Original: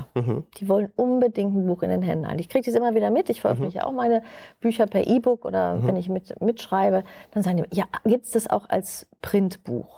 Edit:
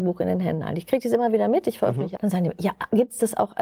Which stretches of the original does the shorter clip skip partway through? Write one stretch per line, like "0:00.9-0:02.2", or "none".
0:03.8-0:07.3